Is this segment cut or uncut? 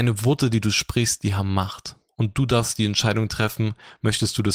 uncut